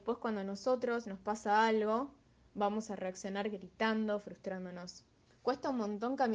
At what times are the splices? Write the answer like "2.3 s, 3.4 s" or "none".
5.3 s